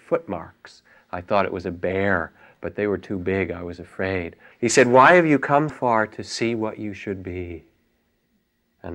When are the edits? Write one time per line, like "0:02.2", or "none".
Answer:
0:04.5
0:05.7